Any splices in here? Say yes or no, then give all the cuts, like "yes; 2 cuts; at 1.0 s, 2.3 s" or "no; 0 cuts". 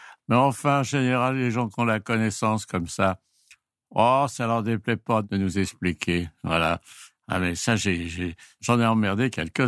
no; 0 cuts